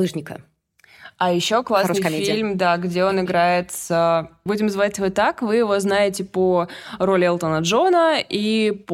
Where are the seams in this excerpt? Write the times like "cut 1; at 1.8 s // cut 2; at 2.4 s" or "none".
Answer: cut 1; at 4.5 s